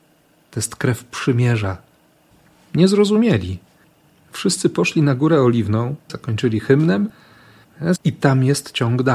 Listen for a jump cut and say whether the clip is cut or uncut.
cut